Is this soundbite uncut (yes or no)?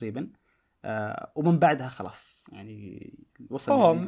yes